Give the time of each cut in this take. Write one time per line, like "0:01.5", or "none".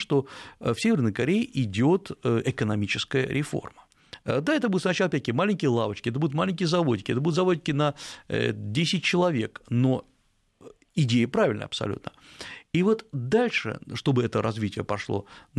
0:04.2